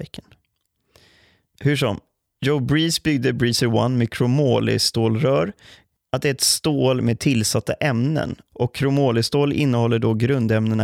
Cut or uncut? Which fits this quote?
cut